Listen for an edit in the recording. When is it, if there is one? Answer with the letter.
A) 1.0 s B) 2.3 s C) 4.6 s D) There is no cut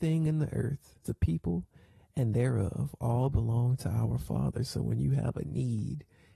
A